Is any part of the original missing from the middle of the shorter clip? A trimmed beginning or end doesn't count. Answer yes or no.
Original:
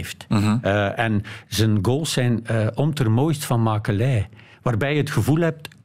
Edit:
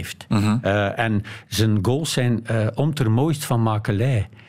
no